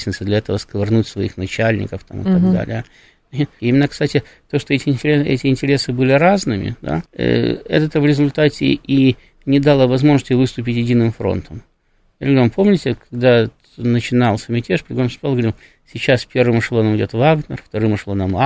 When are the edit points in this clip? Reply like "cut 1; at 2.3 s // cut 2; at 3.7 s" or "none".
cut 1; at 3.6 s // cut 2; at 7.1 s